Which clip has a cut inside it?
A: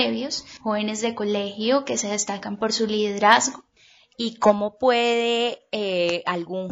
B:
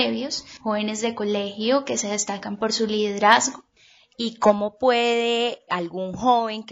B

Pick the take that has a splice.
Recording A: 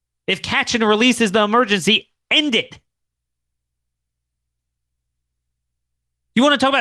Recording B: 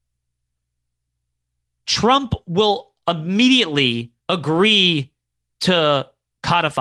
B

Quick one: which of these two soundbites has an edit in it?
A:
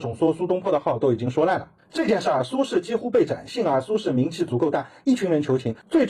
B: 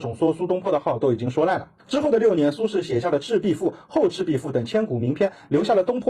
B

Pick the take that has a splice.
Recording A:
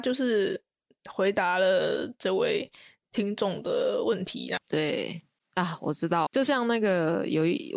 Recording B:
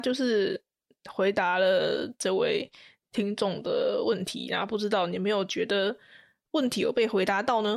A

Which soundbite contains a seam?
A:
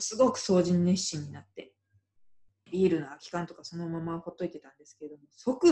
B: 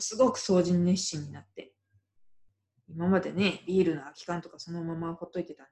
A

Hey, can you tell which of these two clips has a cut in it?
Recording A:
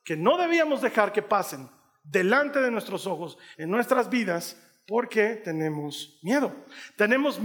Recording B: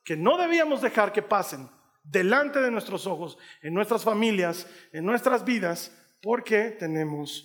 A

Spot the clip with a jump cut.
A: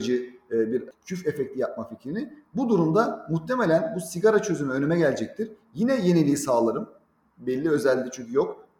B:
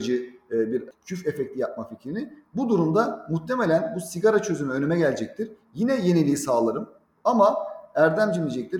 B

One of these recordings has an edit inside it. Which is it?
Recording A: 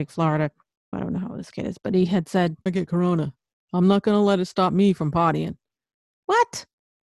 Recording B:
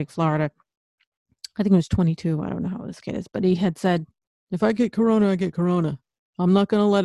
A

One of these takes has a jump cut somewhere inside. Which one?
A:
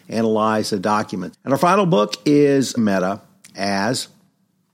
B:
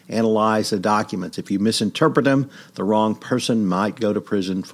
A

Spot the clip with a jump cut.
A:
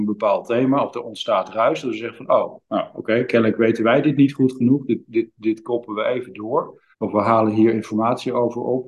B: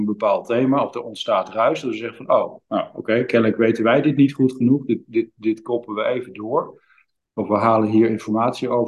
A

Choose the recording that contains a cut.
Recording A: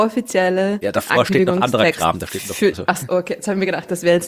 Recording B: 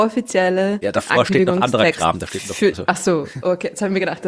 A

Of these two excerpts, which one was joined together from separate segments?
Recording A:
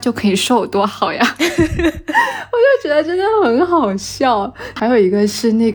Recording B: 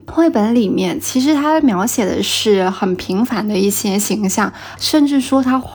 B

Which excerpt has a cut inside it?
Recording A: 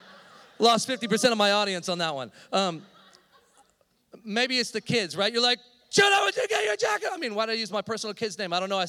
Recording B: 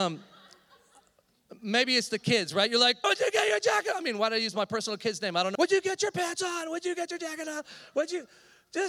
B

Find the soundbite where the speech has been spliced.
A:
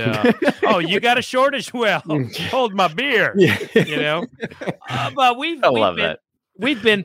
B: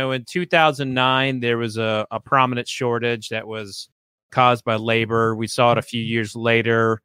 A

